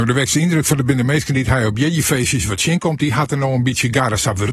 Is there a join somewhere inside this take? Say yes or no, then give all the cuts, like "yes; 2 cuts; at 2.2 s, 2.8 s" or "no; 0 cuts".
no; 0 cuts